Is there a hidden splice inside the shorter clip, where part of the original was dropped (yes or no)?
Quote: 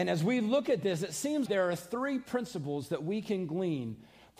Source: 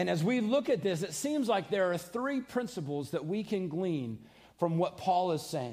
yes